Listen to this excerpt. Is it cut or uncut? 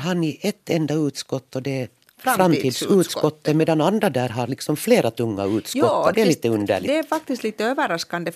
cut